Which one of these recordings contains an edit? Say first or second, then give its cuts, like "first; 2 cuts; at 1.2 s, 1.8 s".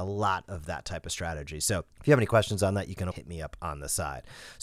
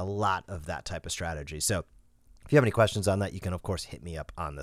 first; 2 cuts; at 1.9 s, 3.1 s